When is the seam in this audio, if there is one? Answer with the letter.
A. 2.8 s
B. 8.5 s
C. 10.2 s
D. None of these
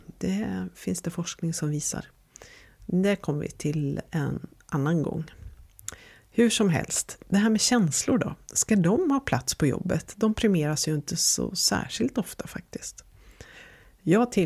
D